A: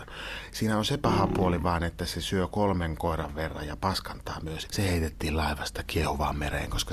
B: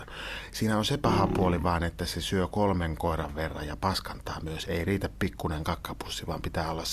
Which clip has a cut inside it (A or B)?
A